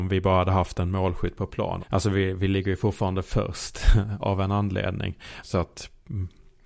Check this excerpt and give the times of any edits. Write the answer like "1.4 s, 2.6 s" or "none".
1.8 s, 5.4 s